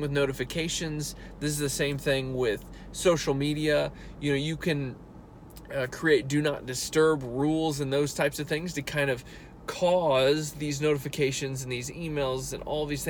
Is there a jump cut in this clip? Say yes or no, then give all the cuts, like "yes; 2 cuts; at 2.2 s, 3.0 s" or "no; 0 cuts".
no; 0 cuts